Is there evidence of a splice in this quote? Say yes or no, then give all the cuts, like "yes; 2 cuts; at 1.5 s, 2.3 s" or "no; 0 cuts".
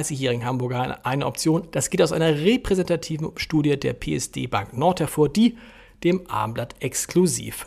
yes; 1 cut; at 1.7 s